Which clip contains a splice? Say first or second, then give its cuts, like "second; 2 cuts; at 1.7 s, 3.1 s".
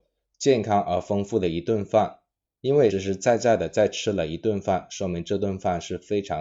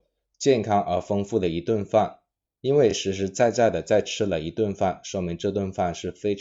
first; 1 cut; at 2.9 s